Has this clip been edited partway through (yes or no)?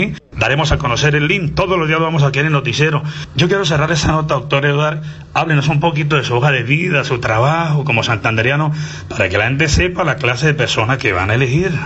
no